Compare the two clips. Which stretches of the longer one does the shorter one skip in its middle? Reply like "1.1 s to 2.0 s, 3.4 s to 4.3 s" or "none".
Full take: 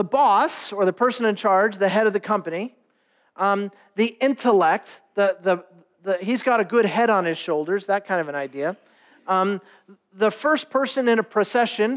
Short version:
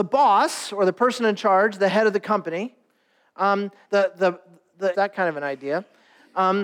3.8 s to 5.1 s, 6.2 s to 7.9 s